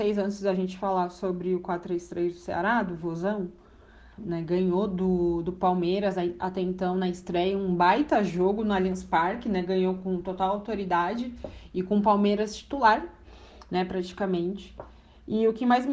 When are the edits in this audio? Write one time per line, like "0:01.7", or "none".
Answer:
0:04.2